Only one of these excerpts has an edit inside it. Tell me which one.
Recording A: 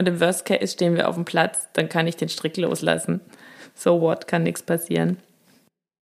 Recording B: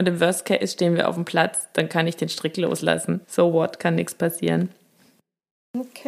B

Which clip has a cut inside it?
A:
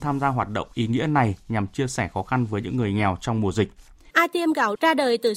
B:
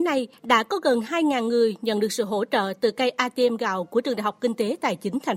A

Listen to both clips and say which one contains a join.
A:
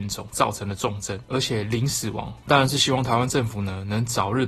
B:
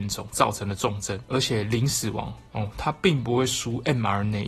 A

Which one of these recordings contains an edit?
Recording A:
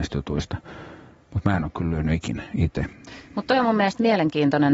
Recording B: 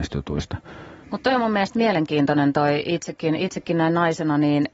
B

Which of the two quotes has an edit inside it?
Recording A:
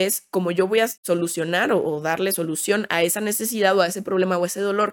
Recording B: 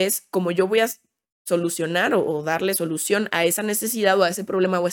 A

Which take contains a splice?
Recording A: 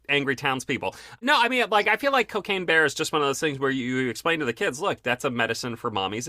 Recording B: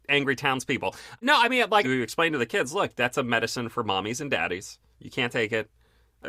B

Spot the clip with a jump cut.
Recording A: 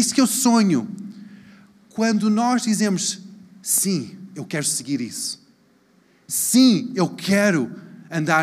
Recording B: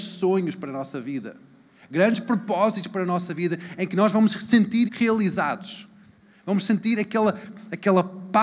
B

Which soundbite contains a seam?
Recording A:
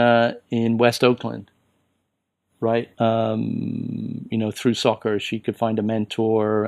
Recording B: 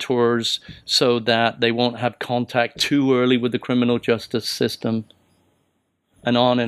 A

